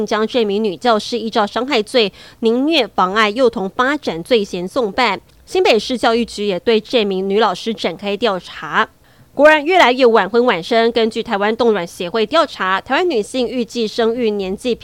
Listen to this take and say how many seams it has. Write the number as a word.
zero